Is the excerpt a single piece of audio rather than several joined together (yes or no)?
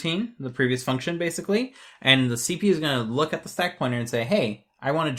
yes